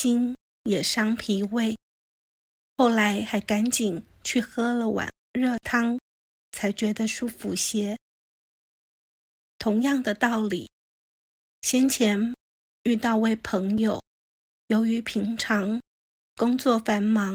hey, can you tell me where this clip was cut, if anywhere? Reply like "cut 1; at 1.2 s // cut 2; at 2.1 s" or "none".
none